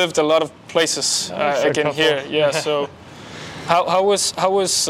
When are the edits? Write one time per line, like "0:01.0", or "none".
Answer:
none